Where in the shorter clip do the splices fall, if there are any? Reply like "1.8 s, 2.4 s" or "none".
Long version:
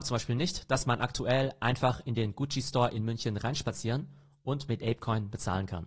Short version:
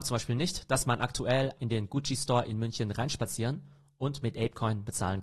1.6 s